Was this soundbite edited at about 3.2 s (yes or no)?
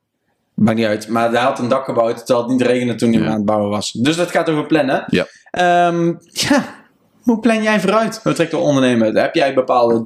no